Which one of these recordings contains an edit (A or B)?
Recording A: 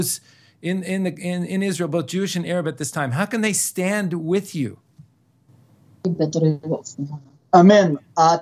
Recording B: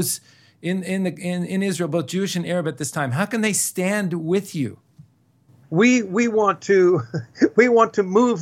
B